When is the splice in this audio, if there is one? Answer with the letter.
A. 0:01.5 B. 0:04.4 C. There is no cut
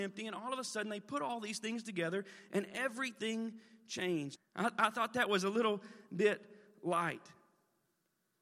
B